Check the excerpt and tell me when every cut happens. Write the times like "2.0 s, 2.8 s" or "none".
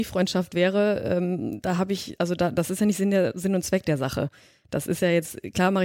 none